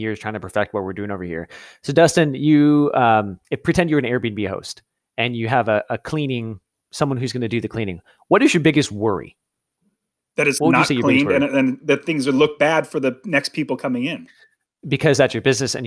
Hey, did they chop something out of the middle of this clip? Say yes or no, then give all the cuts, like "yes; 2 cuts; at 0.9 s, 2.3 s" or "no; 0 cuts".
no; 0 cuts